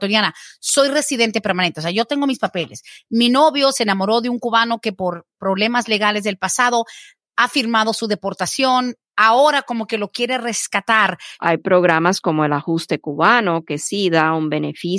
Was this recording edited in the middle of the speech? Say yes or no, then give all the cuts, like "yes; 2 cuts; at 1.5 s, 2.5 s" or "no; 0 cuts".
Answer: yes; 1 cut; at 11.4 s